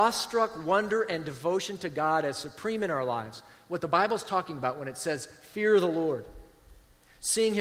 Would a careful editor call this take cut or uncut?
uncut